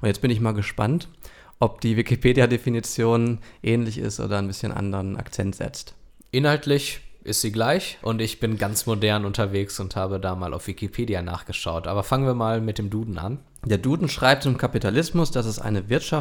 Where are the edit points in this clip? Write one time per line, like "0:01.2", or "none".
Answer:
0:08.0